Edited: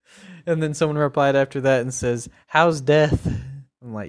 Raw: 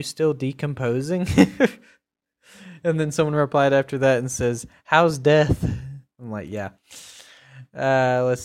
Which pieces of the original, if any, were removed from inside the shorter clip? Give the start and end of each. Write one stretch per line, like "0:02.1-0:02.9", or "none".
none